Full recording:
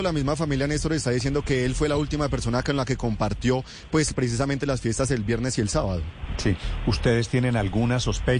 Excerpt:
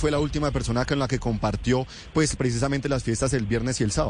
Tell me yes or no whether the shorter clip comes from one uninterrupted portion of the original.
yes